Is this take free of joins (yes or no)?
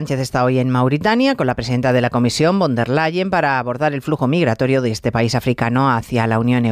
yes